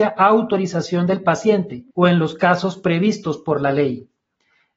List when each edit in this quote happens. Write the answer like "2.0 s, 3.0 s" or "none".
1.9 s